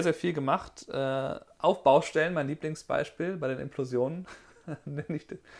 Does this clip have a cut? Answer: no; 0 cuts

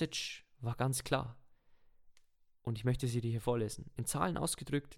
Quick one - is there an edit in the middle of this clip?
no; 0 cuts

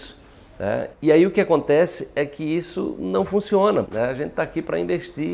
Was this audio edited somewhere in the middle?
yes; 2 cuts; at 0.9 s, 3.9 s

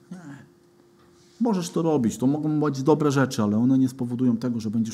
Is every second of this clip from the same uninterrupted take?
yes; 0 cuts

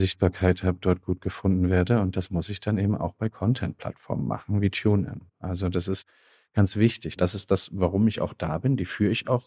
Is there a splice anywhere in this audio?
yes; 1 cut; at 7.2 s

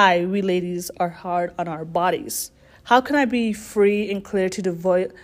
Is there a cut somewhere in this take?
no; 0 cuts

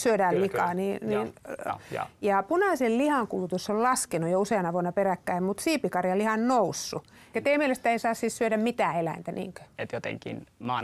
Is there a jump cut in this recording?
yes; 3 cuts; at 1.7 s, 7.3 s, 9.7 s

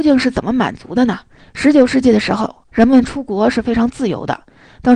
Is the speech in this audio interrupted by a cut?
yes; 2 cuts; at 1.4 s, 2.7 s

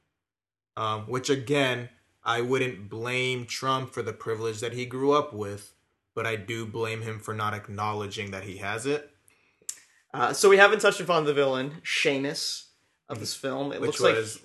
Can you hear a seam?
no; 0 cuts

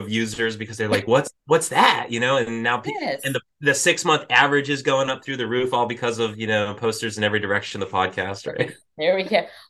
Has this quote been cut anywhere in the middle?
no; 0 cuts

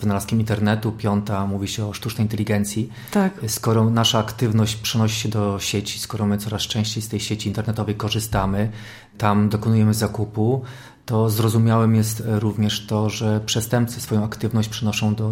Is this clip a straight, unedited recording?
yes; 0 cuts

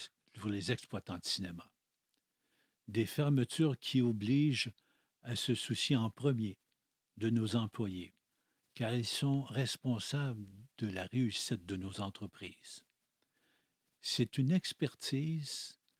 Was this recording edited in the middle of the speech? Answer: no; 0 cuts

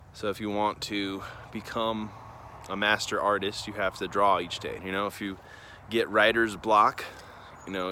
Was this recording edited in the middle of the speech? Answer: yes; 1 cut; at 4.8 s

